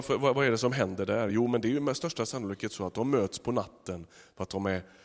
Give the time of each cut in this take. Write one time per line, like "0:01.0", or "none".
none